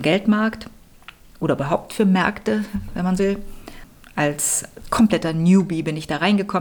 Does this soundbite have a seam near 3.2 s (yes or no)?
yes